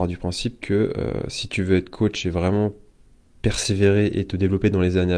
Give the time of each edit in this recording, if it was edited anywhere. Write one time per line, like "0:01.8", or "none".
none